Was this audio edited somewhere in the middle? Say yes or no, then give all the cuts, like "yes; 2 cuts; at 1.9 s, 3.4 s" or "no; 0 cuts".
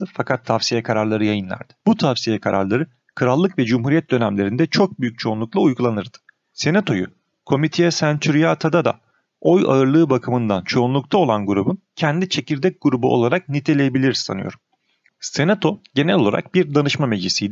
yes; 3 cuts; at 1.8 s, 6.4 s, 15.1 s